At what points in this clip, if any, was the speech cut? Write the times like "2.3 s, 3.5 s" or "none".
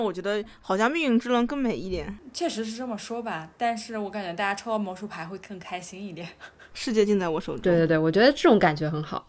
6.7 s